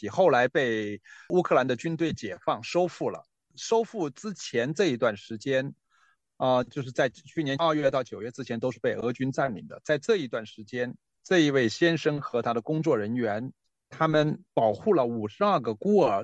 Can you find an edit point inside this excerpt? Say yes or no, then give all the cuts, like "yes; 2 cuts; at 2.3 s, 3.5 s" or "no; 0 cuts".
no; 0 cuts